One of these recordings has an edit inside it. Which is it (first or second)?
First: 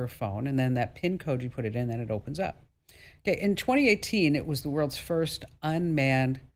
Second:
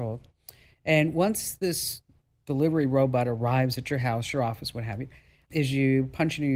second